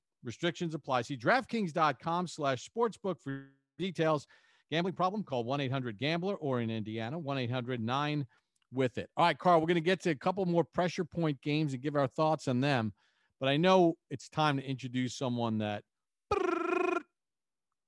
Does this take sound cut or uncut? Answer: uncut